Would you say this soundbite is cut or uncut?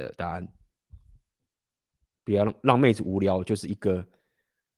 uncut